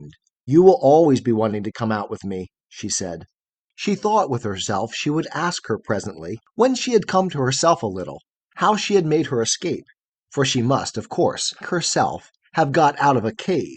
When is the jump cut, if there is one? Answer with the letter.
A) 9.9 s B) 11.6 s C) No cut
B